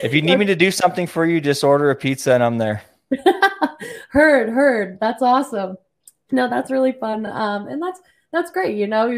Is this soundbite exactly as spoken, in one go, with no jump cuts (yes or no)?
yes